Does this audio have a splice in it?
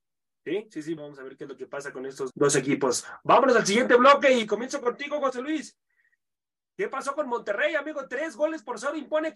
yes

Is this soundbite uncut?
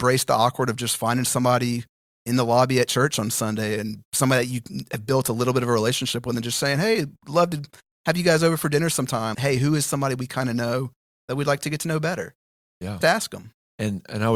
no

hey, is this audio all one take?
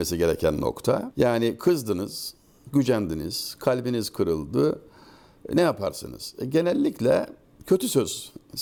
yes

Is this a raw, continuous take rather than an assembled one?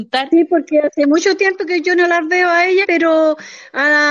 no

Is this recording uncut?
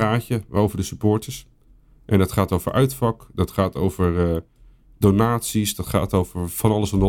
yes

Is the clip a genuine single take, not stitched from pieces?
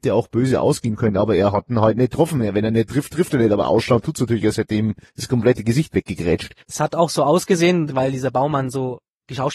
no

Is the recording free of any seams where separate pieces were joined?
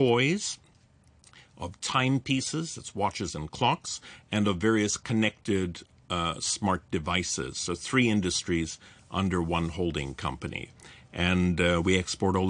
yes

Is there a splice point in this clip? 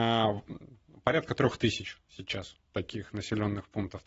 no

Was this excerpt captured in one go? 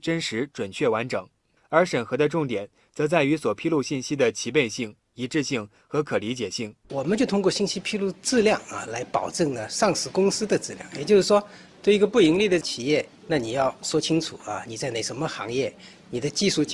yes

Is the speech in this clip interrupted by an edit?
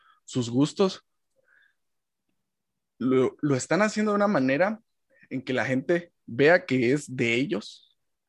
yes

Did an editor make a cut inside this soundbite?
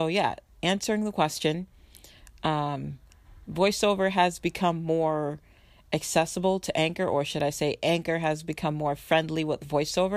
no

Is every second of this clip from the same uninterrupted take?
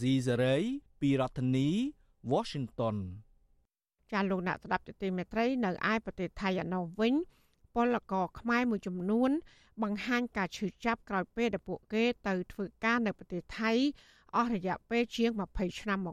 yes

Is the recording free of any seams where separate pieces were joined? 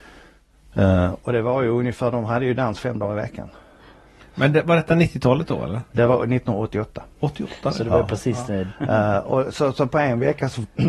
no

